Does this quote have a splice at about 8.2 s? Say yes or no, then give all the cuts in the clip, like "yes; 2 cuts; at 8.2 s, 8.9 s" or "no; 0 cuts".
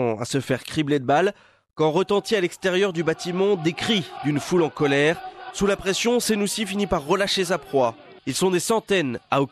yes; 2 cuts; at 5.5 s, 8.2 s